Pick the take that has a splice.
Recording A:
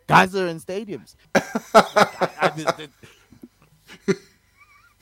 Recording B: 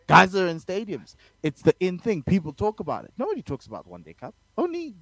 A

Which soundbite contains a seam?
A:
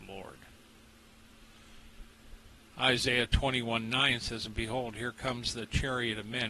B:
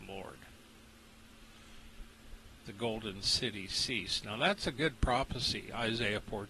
B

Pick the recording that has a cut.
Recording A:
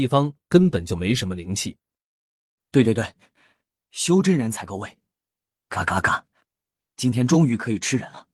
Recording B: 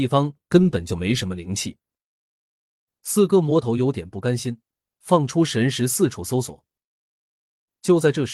A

